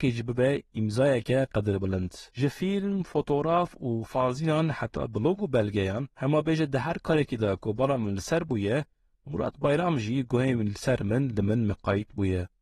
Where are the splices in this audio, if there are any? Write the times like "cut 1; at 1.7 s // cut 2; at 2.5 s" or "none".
cut 1; at 2.3 s // cut 2; at 6.1 s